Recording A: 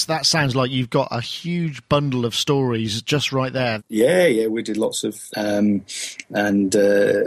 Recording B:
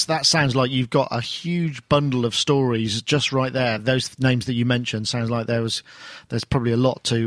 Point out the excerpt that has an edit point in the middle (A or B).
A